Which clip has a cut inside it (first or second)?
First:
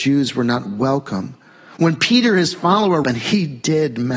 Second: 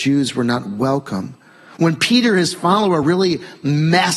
first